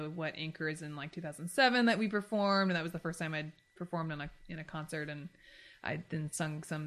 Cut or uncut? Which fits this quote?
uncut